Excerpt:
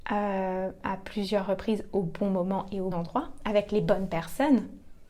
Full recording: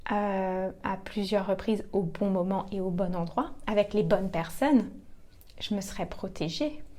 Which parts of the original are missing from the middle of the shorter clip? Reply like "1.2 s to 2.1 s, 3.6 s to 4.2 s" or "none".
2.9 s to 3.1 s